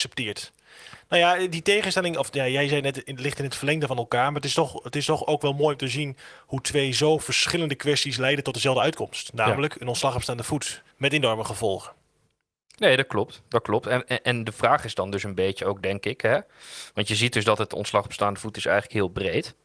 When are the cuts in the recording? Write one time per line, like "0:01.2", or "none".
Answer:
0:10.9